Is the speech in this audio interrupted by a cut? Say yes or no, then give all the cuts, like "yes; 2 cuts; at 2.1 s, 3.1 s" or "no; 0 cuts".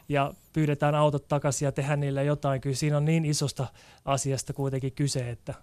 no; 0 cuts